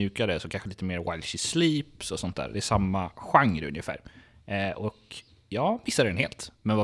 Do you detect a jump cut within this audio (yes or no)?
no